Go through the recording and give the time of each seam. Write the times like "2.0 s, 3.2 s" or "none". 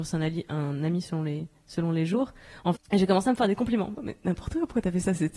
2.7 s, 4.0 s

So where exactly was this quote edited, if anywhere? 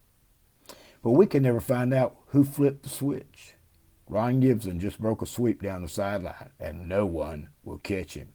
4.0 s, 6.6 s

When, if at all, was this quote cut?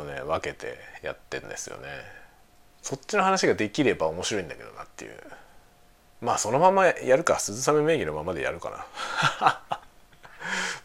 2.7 s

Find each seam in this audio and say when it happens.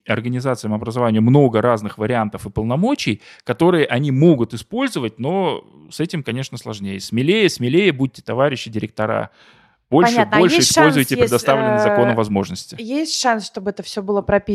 none

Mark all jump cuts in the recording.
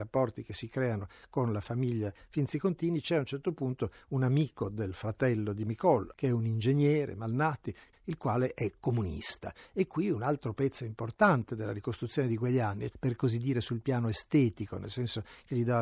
6.1 s, 7.9 s, 12.9 s

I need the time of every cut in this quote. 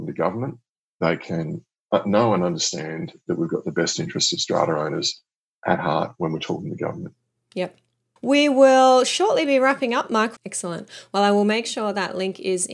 8.2 s, 10.4 s

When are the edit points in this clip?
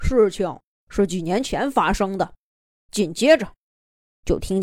2.7 s

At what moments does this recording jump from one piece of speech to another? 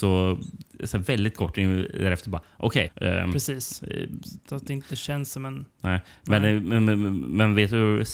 2.9 s

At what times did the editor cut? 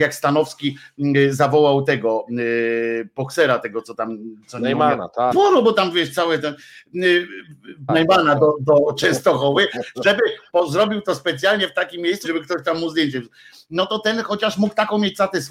5.3 s, 7.9 s, 12.2 s

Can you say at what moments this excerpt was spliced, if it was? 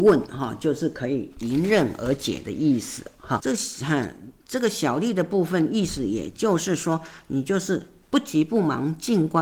3.4 s

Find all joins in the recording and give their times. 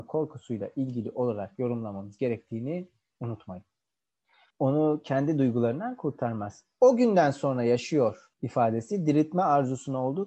4.5 s, 8.3 s

